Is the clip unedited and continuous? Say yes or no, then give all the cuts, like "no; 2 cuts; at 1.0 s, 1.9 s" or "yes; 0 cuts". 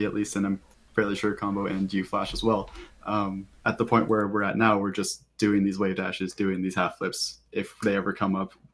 yes; 0 cuts